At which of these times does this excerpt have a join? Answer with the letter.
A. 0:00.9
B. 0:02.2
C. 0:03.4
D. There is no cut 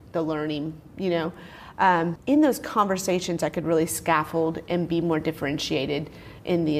B